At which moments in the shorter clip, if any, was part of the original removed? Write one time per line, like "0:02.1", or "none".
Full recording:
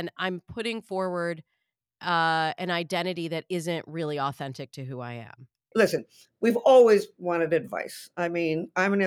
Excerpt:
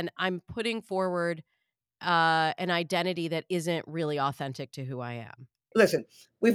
none